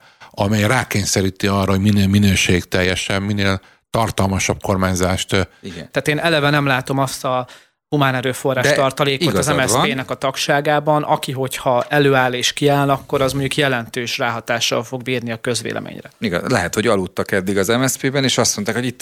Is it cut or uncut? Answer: cut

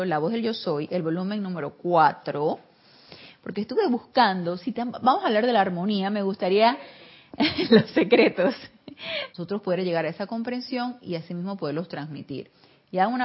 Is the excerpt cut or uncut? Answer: cut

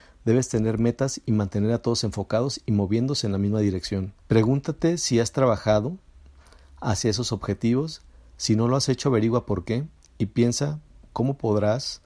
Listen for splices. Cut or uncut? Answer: cut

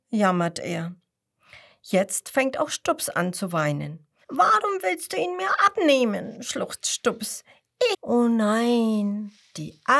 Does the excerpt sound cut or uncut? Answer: cut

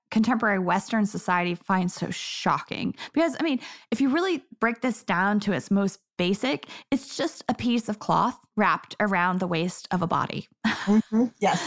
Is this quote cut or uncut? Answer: uncut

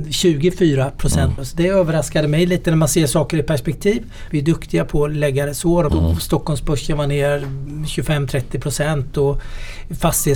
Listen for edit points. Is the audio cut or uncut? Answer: cut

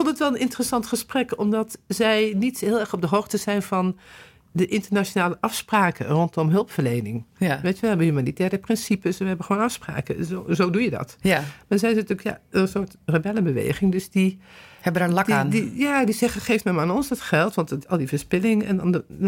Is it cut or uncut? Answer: uncut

